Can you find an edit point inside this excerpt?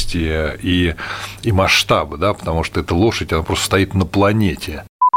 no; 0 cuts

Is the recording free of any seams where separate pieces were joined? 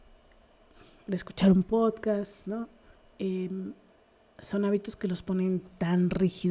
yes; 0 cuts

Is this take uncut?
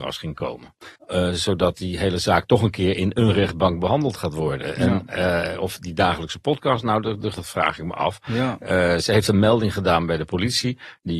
no; 2 cuts; at 0.9 s, 7.3 s

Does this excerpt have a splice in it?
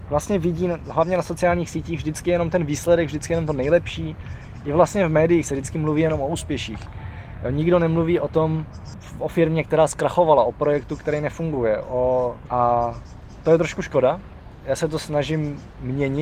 yes; 1 cut; at 12.5 s

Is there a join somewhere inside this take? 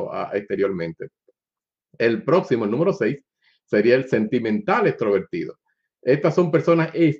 no; 0 cuts

